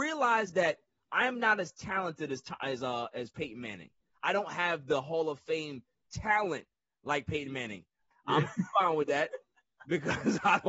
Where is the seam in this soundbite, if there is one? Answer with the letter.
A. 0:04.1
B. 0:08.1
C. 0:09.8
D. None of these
B